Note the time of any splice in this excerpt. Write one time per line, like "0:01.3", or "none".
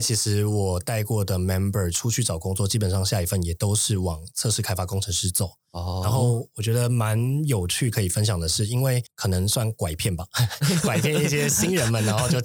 none